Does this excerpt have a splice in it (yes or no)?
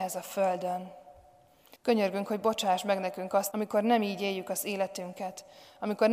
yes